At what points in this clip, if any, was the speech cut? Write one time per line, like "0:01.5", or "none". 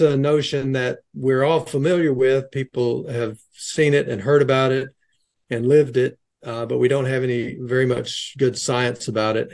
none